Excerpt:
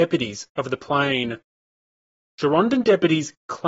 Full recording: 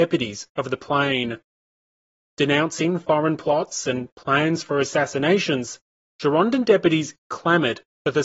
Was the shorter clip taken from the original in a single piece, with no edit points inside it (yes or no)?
no